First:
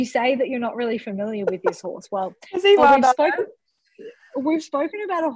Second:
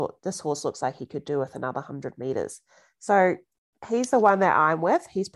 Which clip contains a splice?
first; 1 cut; at 2.8 s

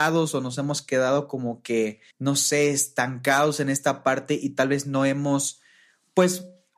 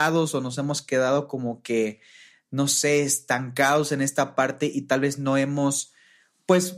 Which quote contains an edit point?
first; 1 cut; at 2.1 s

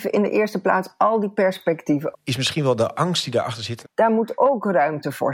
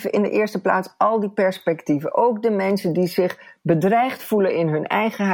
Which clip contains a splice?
first; 2 cuts; at 2.1 s, 3.8 s

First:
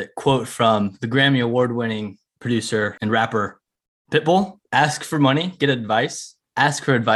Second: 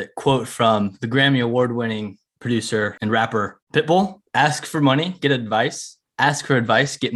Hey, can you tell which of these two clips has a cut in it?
second; 1 cut; at 3.6 s

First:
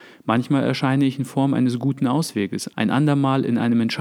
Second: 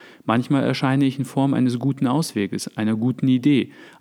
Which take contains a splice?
first; 1 cut; at 2.7 s

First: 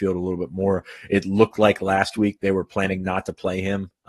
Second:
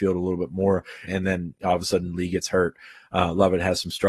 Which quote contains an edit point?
second; 1 cut; at 1.1 s

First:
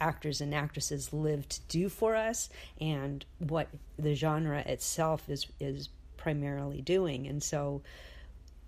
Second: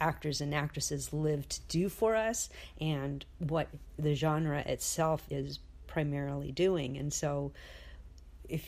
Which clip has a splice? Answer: second; 1 cut; at 5.3 s

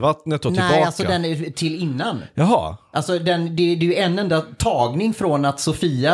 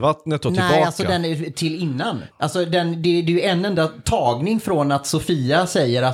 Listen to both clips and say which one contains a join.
second; 1 cut; at 2.3 s

